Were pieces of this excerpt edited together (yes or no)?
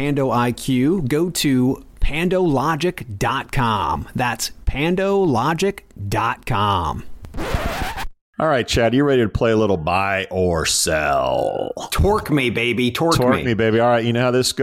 no